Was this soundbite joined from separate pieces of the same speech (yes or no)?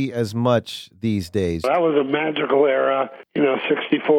yes